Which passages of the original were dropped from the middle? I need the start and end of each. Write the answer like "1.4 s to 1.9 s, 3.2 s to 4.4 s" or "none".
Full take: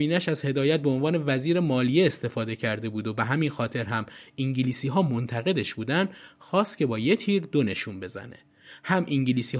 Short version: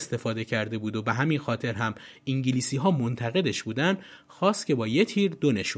none